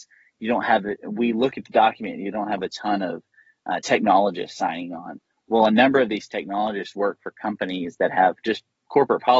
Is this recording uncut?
yes; 0 cuts

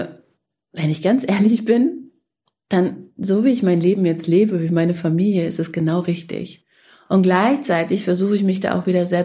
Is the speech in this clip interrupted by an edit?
yes; 1 cut; at 6.9 s

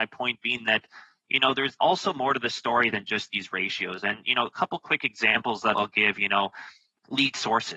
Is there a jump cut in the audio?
no; 0 cuts

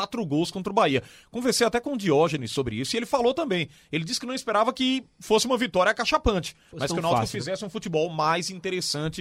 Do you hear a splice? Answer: no; 0 cuts

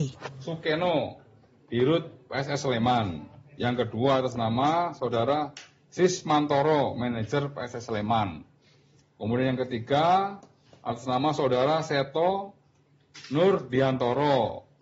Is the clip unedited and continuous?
yes; 0 cuts

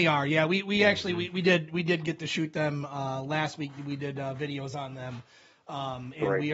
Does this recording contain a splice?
no; 0 cuts

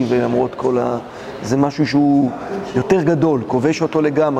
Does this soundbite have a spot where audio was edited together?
no; 0 cuts

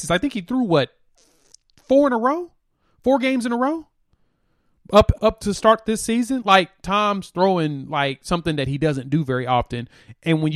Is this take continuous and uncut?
no; 1 cut; at 5.2 s

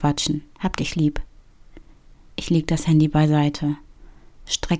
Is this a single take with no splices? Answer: yes; 0 cuts

